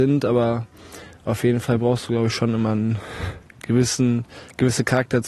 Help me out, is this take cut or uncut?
uncut